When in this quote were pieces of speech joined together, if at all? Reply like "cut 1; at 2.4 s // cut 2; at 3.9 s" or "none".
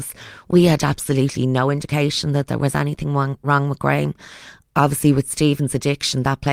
none

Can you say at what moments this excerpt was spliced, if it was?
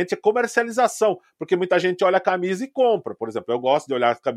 none

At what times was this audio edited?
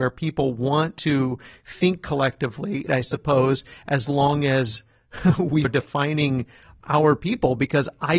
cut 1; at 2.9 s // cut 2; at 5.6 s

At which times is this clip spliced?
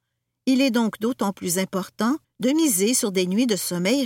cut 1; at 2.2 s

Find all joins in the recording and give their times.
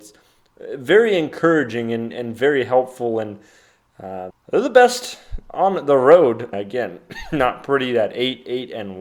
cut 1; at 4.3 s // cut 2; at 6.5 s

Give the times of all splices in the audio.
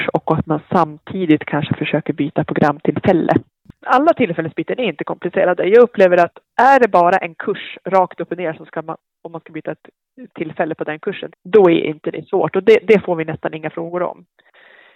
cut 1; at 3.7 s // cut 2; at 11.3 s

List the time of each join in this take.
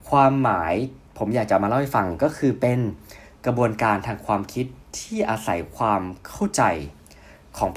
cut 1; at 1.1 s

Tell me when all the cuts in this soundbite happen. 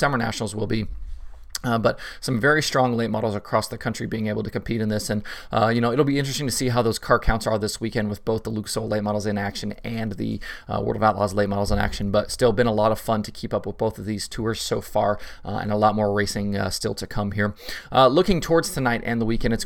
none

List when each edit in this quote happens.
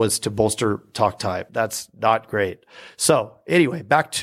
cut 1; at 1.5 s

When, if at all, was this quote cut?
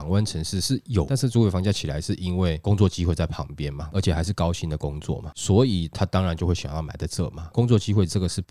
cut 1; at 1.0 s

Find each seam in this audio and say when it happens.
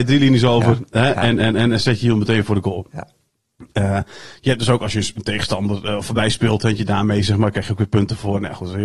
none

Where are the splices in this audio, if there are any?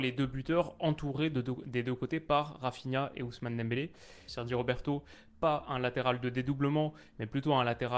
cut 1; at 4.3 s

